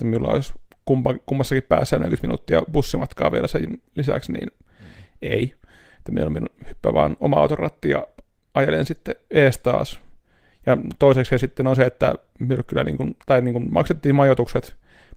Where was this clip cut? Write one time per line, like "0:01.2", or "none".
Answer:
none